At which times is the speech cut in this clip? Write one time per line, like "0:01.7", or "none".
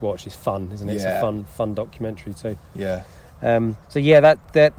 0:03.8